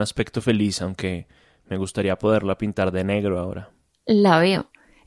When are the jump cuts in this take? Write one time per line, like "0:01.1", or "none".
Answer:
none